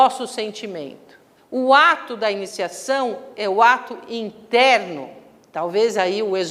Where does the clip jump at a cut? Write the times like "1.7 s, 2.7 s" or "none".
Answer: 1.4 s